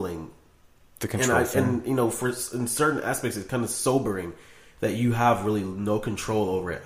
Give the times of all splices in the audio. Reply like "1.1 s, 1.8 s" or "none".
none